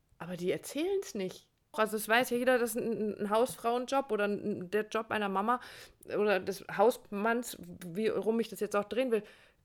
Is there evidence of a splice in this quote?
yes; 1 cut; at 1.7 s

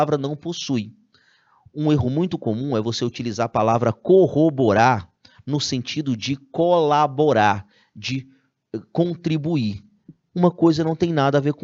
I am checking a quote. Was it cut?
no; 0 cuts

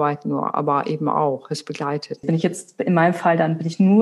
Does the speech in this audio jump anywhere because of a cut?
yes; 1 cut; at 2.2 s

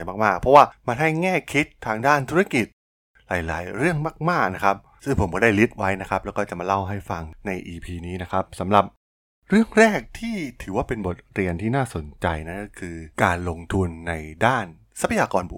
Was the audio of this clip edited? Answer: yes; 1 cut; at 13.1 s

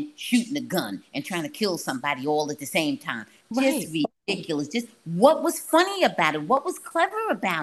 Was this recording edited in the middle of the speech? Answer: no; 0 cuts

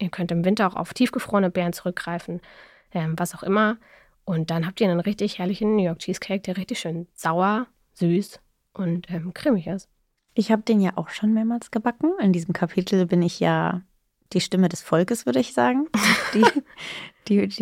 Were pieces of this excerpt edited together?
no; 0 cuts

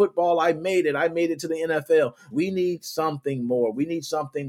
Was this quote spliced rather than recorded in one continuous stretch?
yes; 1 cut; at 2.3 s

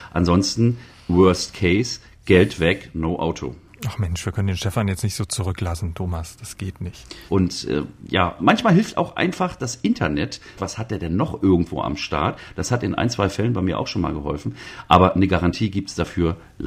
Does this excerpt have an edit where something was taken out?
yes; 3 cuts; at 7.3 s, 8.4 s, 10.6 s

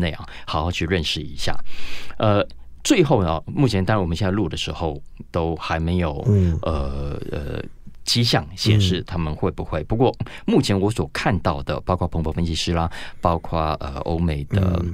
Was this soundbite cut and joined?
no; 0 cuts

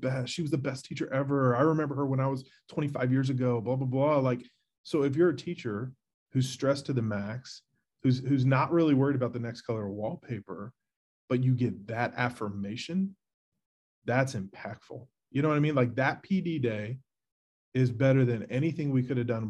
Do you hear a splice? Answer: no; 0 cuts

